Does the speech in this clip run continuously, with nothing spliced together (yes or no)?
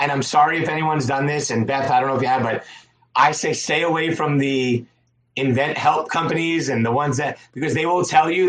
yes